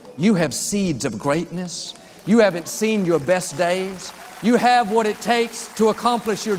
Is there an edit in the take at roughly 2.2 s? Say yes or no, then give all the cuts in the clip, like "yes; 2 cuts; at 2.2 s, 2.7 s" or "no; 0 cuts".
no; 0 cuts